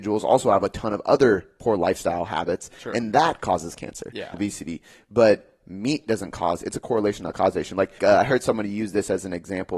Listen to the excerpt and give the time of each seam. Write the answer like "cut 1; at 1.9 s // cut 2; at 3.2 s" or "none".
cut 1; at 4.3 s // cut 2; at 8.0 s